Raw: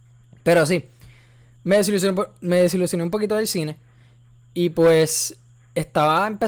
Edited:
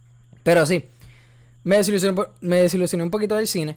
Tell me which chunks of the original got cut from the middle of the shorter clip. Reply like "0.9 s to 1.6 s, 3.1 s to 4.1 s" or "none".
none